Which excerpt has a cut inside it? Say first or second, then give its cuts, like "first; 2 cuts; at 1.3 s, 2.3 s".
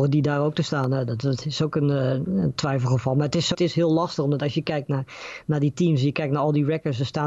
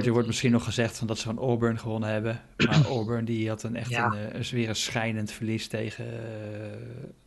first; 1 cut; at 3.5 s